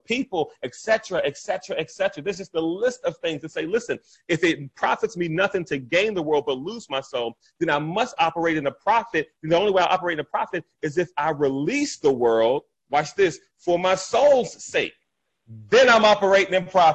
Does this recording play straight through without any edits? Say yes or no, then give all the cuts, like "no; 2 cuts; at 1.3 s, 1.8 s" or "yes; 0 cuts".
yes; 0 cuts